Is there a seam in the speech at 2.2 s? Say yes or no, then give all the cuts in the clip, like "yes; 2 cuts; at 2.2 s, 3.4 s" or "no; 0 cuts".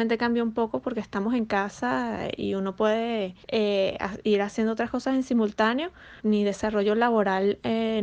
no; 2 cuts; at 3.4 s, 6.2 s